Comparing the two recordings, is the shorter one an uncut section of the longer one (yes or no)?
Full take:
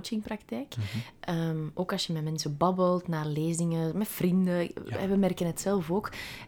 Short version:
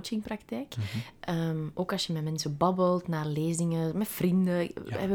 yes